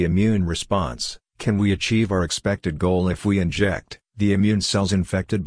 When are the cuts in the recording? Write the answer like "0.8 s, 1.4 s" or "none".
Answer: 4.0 s